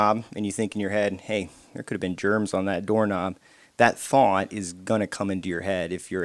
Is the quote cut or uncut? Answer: uncut